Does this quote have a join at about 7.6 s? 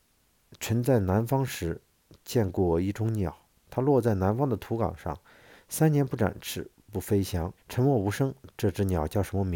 yes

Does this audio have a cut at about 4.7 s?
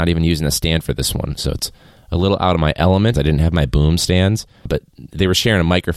yes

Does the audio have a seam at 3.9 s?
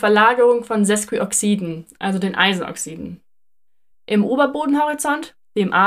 yes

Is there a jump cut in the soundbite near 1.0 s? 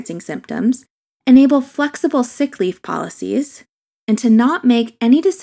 no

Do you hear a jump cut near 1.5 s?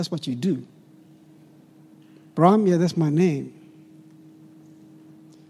no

